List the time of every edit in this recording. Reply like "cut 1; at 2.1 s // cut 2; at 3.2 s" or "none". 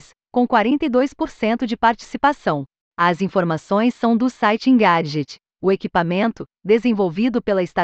cut 1; at 2.8 s // cut 2; at 5.5 s